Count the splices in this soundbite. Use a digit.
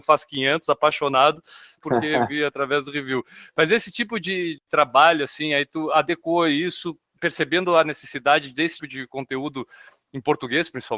2